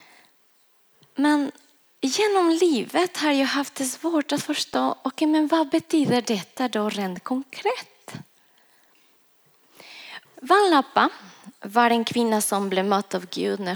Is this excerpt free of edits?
no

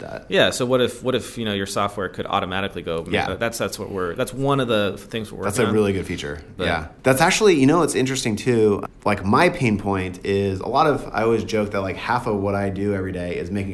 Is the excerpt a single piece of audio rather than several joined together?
no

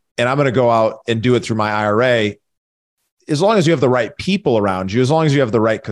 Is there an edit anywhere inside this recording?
no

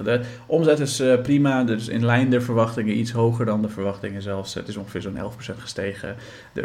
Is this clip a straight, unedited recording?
yes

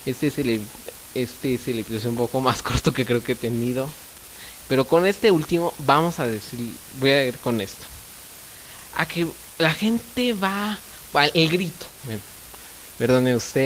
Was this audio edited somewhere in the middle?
yes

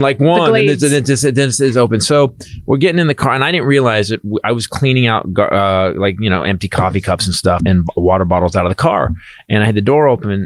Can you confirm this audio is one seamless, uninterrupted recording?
no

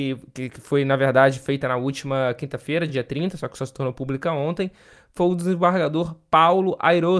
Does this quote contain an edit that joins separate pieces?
no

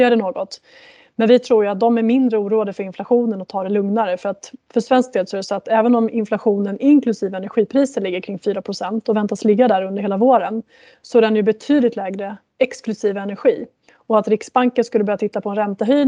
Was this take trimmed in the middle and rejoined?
yes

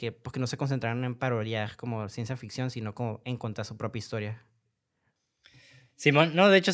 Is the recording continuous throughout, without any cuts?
yes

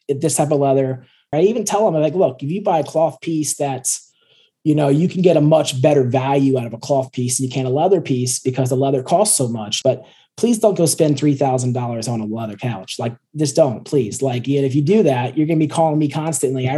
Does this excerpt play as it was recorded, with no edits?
no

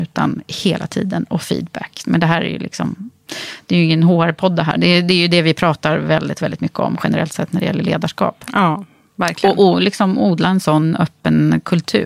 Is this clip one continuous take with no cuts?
no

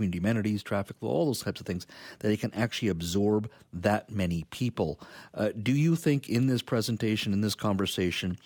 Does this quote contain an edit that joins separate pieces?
no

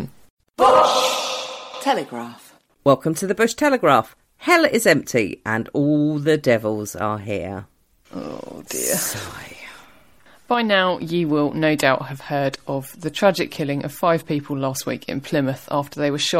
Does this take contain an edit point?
no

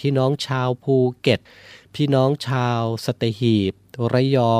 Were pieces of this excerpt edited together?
no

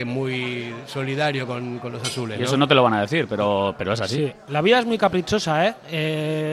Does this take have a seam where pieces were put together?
no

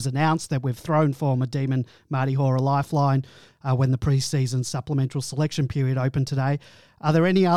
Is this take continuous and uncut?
yes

